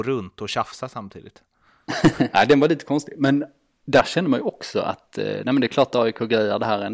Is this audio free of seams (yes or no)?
no